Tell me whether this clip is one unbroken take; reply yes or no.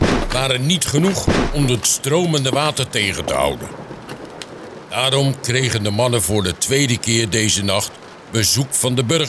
yes